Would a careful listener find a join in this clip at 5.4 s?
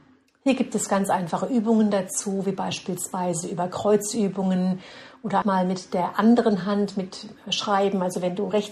yes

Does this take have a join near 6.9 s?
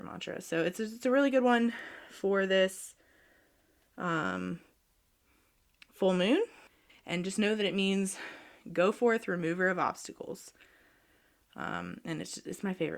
yes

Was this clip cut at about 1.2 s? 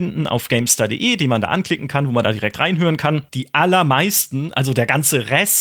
no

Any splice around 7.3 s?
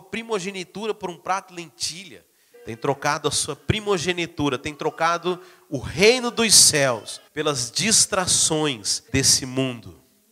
yes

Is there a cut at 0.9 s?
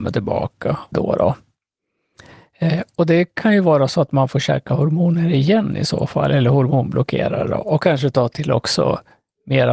yes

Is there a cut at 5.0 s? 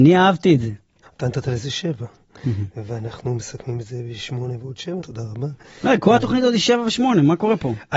yes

